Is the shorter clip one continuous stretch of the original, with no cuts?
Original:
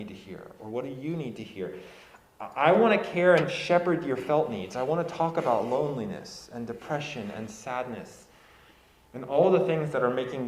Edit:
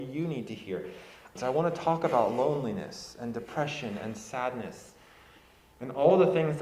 no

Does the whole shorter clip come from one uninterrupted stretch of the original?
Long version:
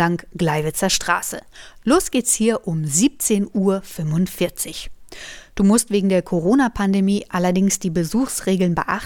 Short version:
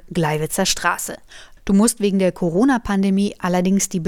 no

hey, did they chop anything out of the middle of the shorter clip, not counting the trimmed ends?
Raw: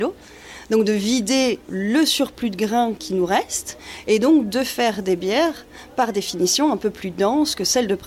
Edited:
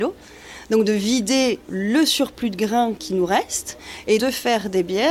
yes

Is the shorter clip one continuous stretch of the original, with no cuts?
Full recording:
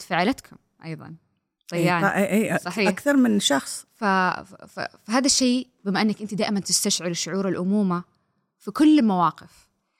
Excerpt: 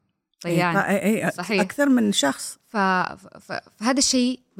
yes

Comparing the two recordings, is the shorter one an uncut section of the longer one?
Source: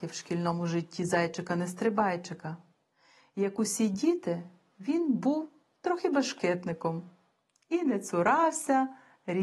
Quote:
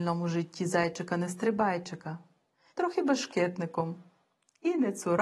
no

